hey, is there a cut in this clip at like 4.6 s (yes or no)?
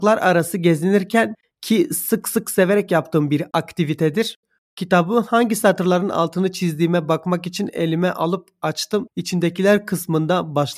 yes